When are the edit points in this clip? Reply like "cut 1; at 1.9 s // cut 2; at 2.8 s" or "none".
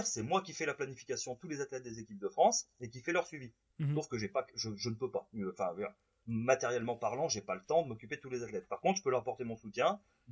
none